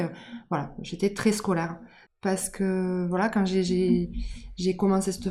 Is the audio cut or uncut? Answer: cut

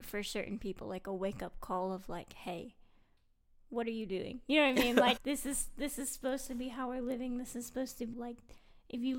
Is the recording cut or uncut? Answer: cut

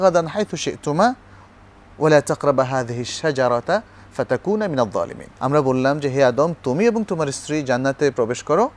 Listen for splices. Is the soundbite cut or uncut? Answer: cut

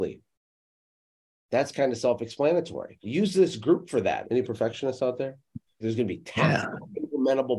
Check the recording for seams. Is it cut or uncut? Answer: cut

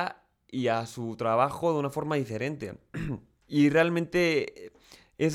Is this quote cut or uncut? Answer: cut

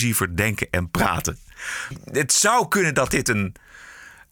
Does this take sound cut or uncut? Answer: uncut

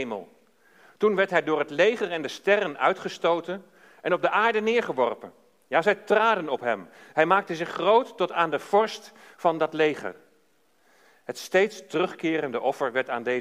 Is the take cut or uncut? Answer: uncut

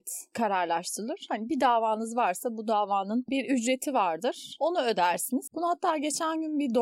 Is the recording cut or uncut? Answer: cut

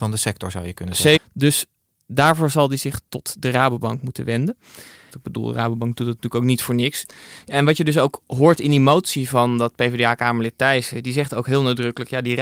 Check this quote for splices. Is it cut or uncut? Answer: cut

